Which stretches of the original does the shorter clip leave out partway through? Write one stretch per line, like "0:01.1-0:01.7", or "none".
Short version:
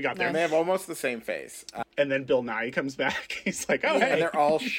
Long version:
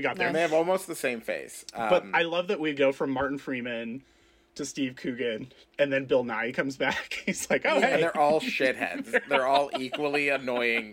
0:01.8-0:05.6